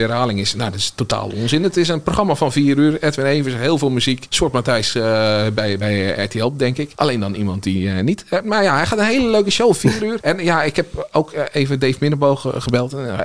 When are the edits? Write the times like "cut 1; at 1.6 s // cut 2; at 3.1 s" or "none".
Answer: none

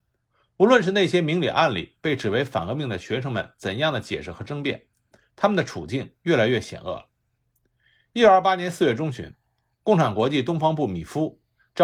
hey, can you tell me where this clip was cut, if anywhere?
none

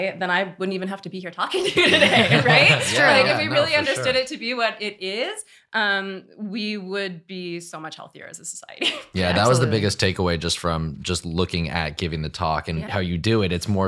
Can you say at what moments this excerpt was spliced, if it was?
cut 1; at 12.9 s

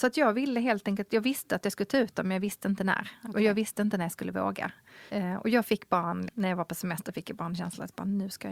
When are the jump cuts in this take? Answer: cut 1; at 6.3 s

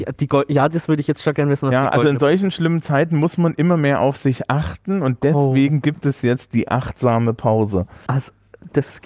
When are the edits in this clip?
cut 1; at 8.1 s

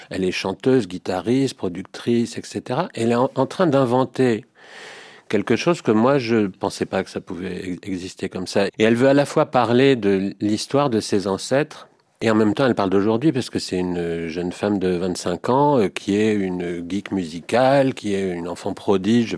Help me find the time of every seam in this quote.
cut 1; at 8.7 s

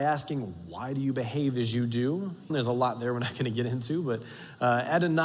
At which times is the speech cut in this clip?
cut 1; at 2.5 s

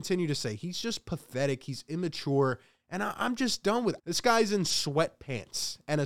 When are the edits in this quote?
cut 1; at 4.0 s

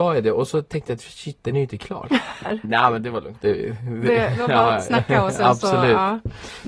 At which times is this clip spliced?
cut 1; at 2.4 s

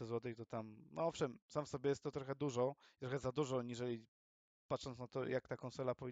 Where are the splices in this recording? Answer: none

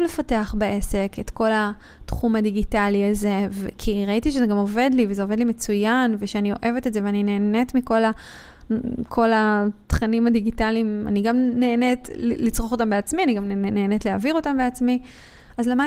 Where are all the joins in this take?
none

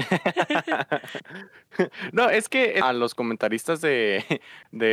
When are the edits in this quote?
cut 1; at 2.8 s

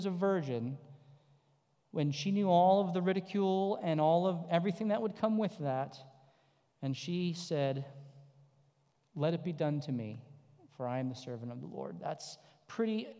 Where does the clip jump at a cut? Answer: none

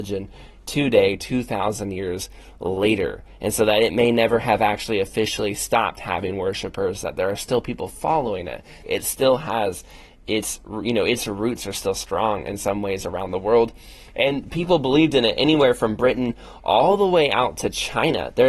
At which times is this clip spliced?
cut 1; at 8.8 s

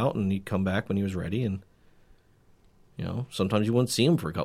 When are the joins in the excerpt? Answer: none

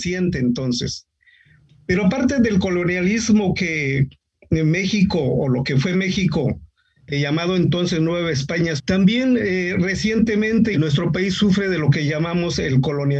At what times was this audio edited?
cut 1; at 8.8 s // cut 2; at 10.7 s

